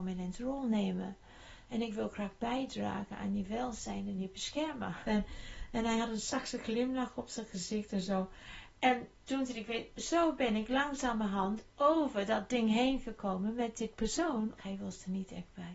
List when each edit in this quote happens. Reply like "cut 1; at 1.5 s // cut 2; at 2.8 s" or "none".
cut 1; at 5.0 s // cut 2; at 14.6 s